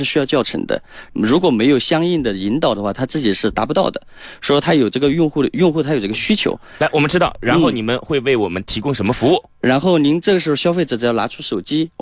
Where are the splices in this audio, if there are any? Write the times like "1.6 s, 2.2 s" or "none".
1.1 s

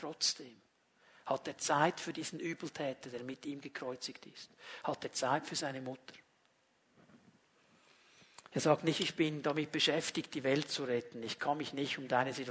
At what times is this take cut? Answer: none

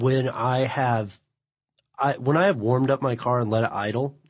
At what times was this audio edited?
none

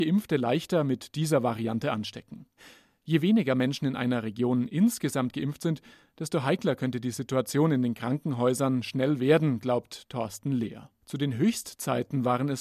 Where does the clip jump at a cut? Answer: 11.0 s

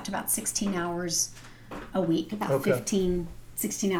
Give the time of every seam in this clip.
none

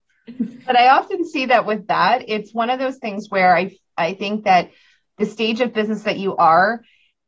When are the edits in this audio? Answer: none

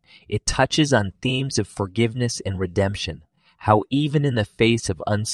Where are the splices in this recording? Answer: none

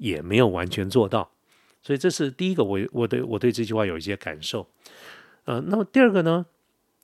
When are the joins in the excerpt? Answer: none

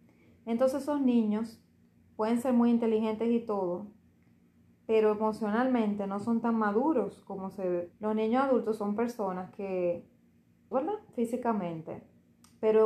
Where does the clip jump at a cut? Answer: 7.9 s, 10.7 s

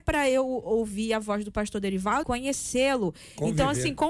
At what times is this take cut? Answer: 2.2 s

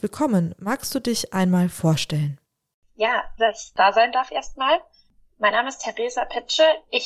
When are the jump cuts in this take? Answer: 3.4 s

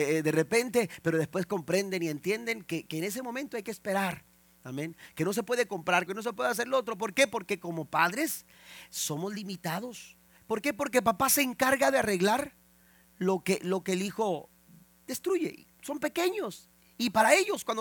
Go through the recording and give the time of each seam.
6.1 s, 10.4 s

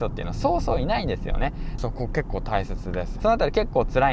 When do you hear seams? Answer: 1.8 s, 3.2 s

